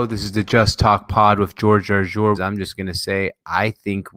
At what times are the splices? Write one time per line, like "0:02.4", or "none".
0:02.3

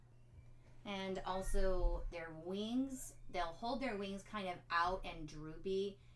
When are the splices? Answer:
0:02.1

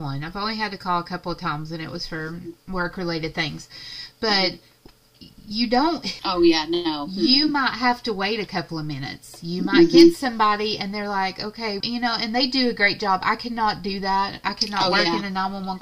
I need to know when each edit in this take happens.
0:06.2
0:11.8

